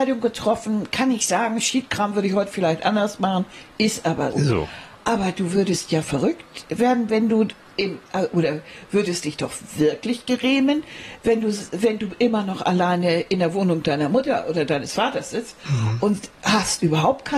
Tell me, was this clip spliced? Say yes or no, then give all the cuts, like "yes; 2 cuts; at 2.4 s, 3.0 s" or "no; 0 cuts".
yes; 1 cut; at 4.3 s